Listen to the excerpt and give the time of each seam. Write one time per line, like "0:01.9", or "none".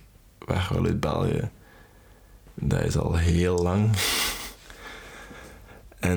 none